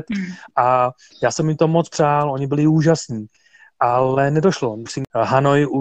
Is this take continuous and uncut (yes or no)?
no